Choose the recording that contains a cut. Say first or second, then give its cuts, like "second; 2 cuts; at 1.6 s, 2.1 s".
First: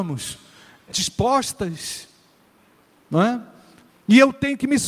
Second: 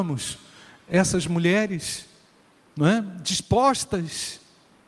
first; 2 cuts; at 0.9 s, 3.9 s